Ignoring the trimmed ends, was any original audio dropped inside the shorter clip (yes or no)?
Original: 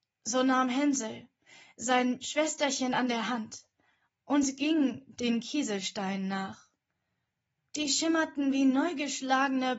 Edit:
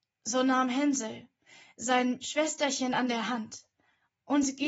no